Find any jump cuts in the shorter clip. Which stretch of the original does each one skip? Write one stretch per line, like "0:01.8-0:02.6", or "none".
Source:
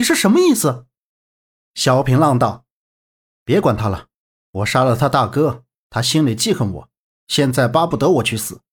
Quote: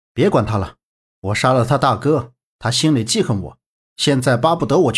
none